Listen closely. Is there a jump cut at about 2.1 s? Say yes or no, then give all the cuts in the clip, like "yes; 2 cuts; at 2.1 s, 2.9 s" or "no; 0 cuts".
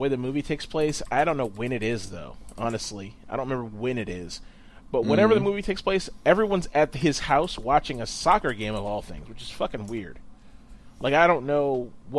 no; 0 cuts